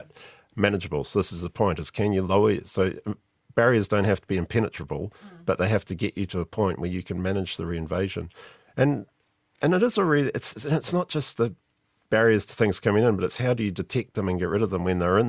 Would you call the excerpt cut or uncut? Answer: uncut